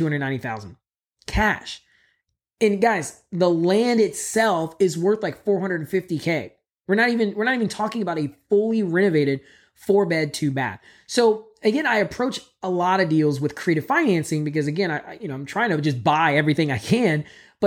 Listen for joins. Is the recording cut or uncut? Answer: uncut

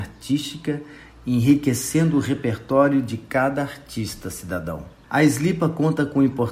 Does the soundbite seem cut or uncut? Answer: cut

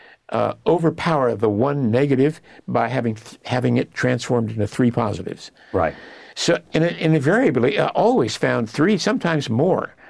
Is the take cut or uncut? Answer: uncut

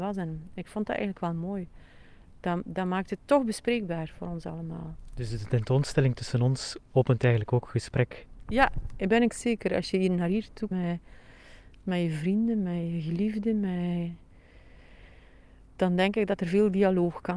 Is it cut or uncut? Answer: cut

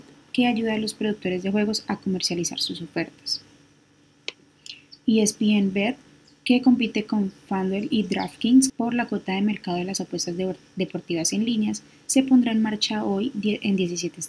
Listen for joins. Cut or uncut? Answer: cut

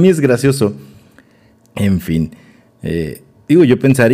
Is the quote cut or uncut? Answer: cut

